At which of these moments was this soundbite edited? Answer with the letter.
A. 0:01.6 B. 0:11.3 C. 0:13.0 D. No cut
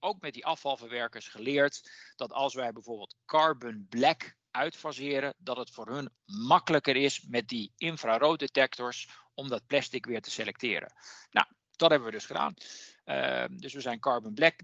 D